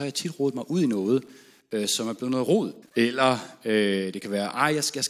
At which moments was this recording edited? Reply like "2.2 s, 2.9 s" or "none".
2.8 s